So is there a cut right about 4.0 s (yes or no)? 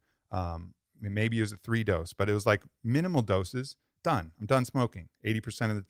yes